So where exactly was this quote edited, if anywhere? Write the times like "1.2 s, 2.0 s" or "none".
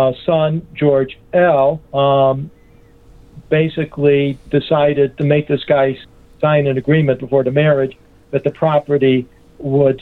1.8 s